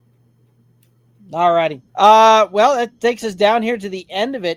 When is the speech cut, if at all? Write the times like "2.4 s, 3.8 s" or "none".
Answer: 1.9 s